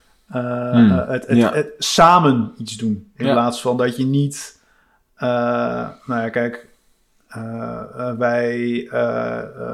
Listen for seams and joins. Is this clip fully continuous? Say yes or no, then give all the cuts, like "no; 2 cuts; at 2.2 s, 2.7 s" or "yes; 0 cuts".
yes; 0 cuts